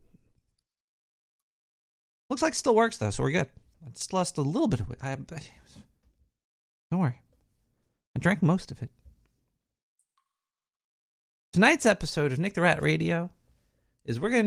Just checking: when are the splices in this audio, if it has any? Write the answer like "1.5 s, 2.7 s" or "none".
none

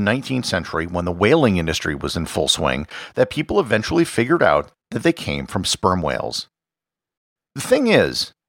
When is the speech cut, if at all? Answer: none

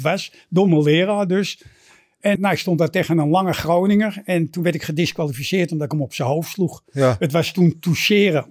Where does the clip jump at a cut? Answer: 2.4 s

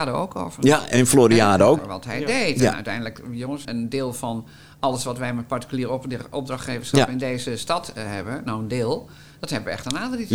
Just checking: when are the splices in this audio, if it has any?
1.8 s, 3.6 s

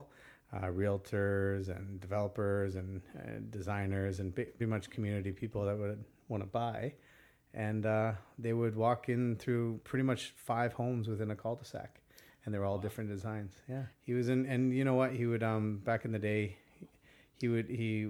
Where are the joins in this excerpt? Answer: 4.6 s, 13.9 s

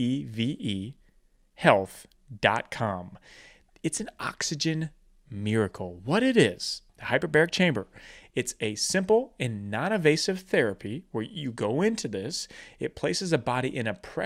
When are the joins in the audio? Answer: 6.9 s

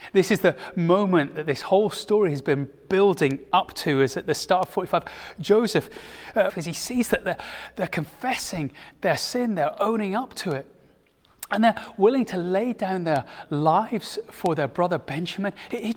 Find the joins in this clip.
6.5 s

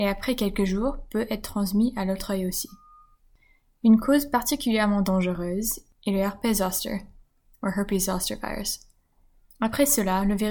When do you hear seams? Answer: 9.5 s

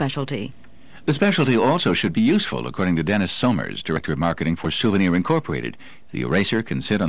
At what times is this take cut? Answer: 6.0 s

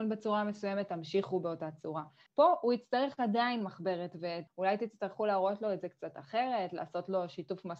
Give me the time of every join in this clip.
2.3 s, 4.5 s

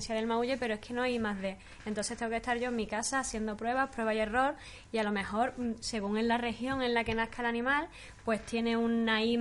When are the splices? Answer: none

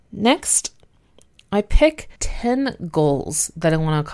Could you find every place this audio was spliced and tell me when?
2.2 s

